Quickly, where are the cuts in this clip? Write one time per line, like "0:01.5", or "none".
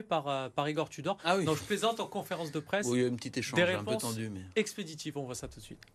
none